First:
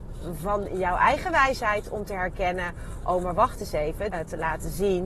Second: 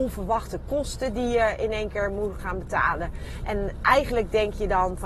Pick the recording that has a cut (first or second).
first